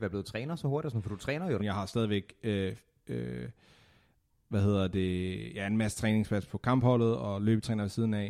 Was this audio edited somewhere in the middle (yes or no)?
yes